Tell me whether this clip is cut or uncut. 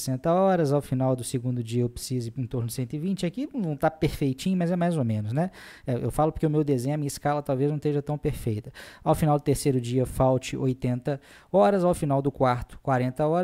uncut